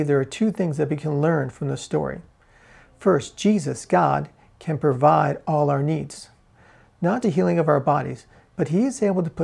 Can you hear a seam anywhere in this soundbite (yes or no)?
yes